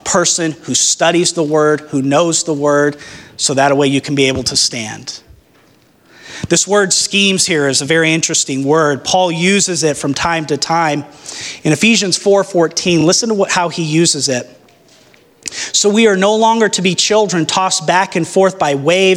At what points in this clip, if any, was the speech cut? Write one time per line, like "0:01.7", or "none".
none